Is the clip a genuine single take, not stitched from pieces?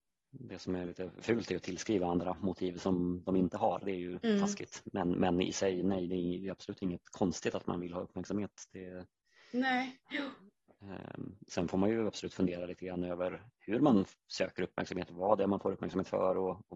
no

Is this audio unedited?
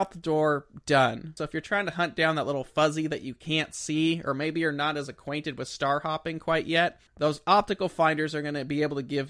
no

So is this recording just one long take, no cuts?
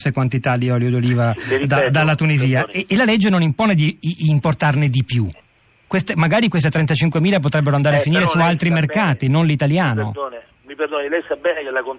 yes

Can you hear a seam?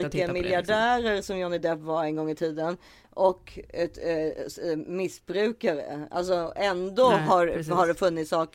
no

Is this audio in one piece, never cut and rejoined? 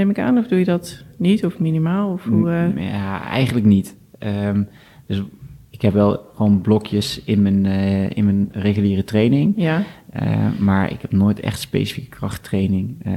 yes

